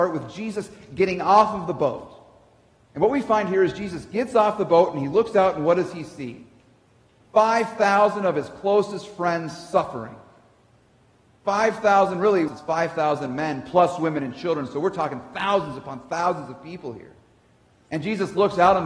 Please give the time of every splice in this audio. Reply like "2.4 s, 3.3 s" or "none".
12.5 s